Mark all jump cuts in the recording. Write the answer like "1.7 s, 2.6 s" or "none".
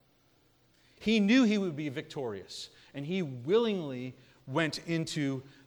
1.0 s